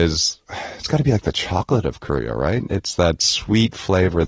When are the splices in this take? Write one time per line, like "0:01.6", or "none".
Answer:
none